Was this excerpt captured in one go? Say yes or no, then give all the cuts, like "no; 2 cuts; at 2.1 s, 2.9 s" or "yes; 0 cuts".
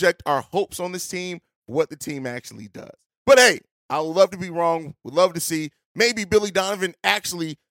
no; 1 cut; at 5.8 s